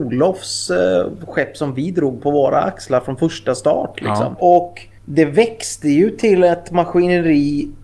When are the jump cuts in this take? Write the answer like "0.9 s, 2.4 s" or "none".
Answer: 4.4 s